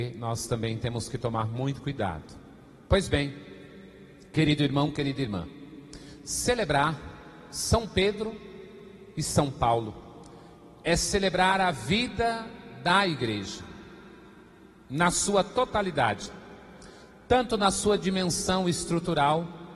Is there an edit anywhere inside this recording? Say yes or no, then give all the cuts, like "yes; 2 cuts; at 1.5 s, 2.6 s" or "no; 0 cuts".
no; 0 cuts